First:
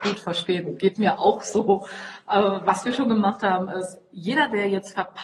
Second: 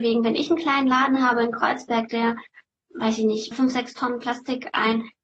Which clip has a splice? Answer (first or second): second